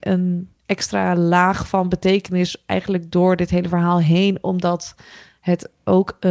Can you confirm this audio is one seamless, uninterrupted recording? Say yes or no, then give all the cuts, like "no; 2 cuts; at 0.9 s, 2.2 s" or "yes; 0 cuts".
yes; 0 cuts